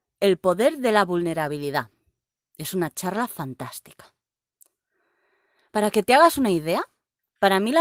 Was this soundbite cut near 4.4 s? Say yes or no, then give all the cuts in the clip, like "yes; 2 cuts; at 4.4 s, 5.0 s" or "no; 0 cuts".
no; 1 cut; at 5.7 s